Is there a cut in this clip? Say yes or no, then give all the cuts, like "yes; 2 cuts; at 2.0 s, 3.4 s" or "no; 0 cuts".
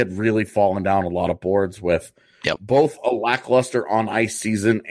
no; 0 cuts